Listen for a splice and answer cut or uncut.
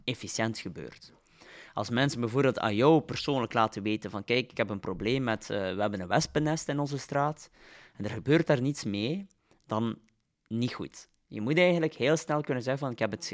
uncut